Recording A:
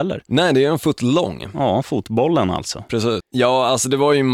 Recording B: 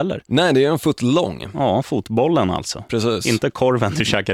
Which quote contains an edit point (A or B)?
A